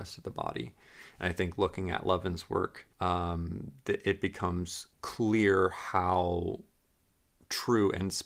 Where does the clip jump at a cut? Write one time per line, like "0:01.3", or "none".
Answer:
0:02.9
0:04.9